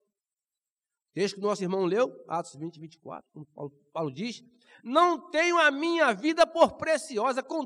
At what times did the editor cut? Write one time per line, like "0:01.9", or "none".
none